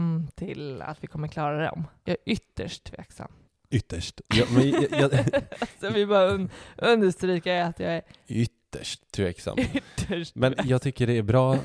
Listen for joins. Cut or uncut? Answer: cut